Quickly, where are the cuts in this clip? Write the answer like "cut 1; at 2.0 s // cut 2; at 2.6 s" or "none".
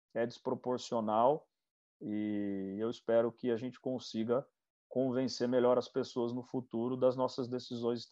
none